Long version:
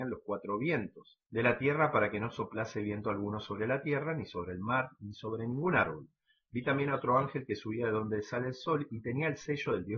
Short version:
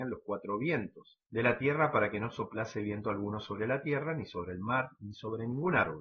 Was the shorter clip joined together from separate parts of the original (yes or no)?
no